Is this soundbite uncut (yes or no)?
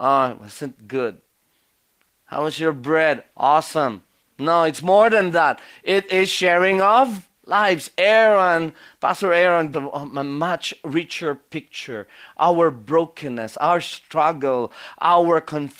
no